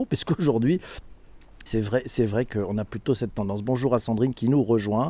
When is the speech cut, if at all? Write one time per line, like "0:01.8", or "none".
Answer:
0:01.7

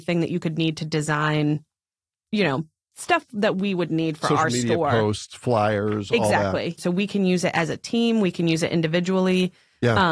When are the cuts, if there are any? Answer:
0:06.8

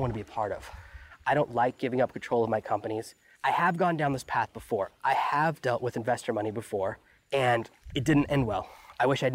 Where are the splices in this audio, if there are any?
none

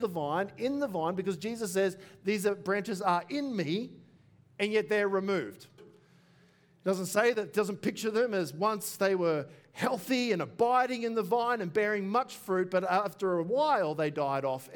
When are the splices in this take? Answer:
0:05.8

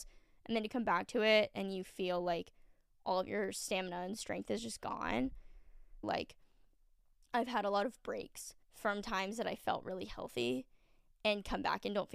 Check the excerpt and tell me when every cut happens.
0:06.0
0:08.6

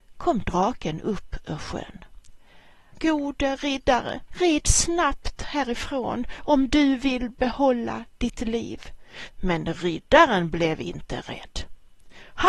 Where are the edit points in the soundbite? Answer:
0:02.9
0:04.3
0:09.3

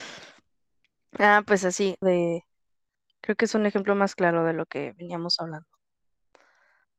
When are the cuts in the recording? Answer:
0:02.0

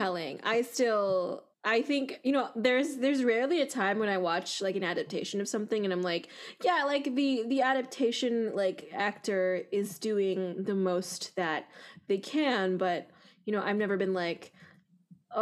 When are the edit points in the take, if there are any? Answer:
0:01.5

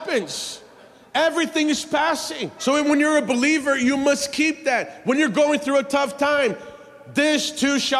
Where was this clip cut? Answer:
0:02.6

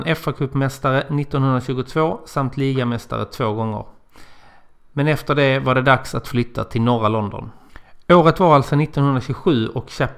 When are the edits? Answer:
none

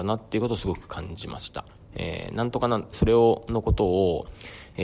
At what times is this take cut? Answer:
0:01.9
0:02.9

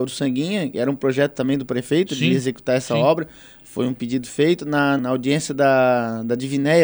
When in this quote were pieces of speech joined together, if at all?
0:05.0

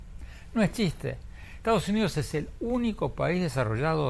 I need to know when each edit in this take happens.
none

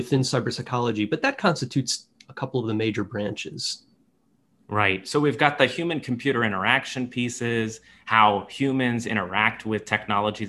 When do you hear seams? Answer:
none

